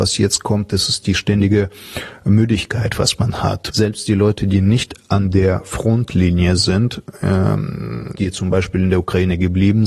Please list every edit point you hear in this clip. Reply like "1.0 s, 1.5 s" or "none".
3.7 s, 8.1 s